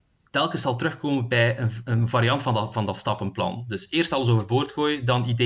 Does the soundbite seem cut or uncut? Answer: uncut